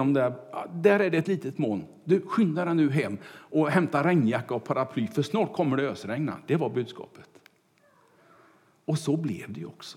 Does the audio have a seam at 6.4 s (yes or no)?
no